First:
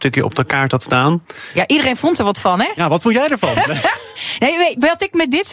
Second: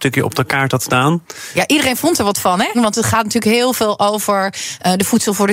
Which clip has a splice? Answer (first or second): second